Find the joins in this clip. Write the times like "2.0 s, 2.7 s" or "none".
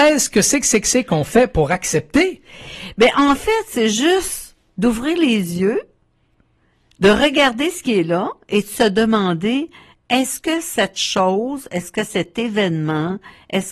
none